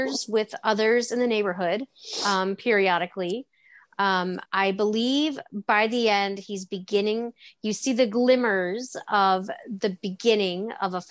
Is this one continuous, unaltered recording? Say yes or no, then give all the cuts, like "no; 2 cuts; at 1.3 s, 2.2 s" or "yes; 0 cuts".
yes; 0 cuts